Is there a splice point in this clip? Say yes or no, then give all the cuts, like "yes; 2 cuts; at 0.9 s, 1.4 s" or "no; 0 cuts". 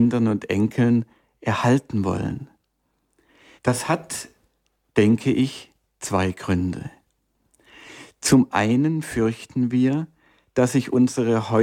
yes; 1 cut; at 3.6 s